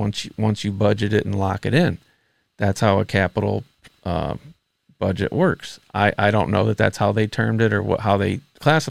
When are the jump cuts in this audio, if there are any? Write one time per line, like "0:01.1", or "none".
none